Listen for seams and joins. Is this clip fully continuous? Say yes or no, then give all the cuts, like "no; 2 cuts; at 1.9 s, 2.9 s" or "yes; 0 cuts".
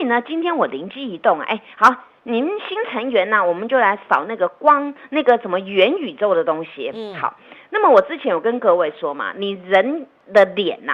yes; 0 cuts